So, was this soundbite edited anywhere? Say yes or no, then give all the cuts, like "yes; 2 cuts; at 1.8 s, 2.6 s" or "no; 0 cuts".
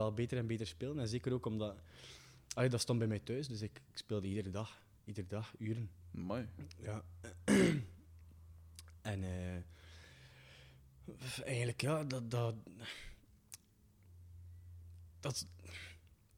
no; 0 cuts